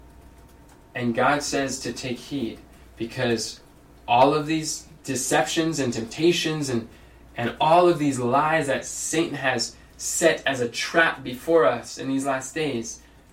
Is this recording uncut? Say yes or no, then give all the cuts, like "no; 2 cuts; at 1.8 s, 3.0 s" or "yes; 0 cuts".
yes; 0 cuts